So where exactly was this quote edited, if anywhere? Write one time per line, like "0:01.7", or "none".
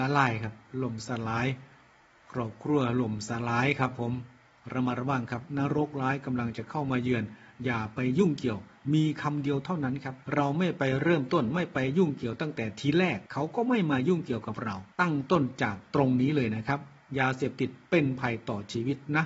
0:10.2
0:13.3
0:14.9